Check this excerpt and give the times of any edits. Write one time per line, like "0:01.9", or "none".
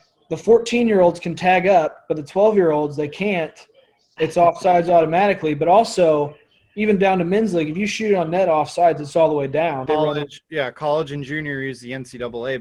0:09.9